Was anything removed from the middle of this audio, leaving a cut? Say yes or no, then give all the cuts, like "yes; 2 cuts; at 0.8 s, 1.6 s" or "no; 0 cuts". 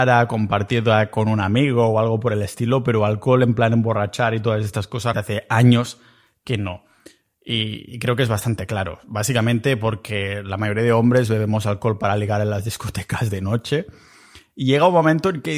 yes; 1 cut; at 5.1 s